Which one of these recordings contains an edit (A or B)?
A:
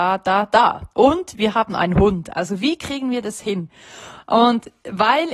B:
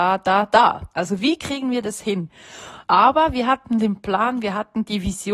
B